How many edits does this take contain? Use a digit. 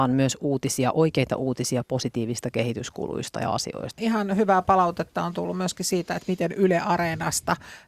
1